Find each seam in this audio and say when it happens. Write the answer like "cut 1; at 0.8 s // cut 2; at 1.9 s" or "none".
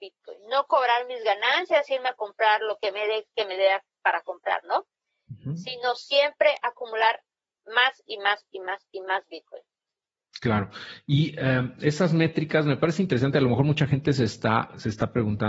none